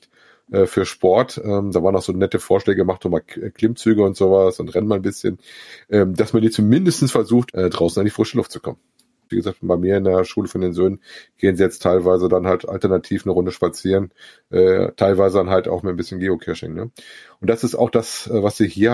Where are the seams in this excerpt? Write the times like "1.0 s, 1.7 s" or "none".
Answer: 7.5 s, 9.3 s